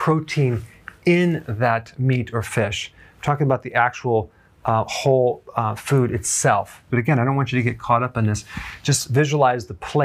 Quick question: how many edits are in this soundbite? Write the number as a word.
one